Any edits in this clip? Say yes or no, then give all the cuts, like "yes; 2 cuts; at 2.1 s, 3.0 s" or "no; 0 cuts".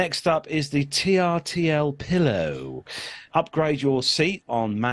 yes; 1 cut; at 3.3 s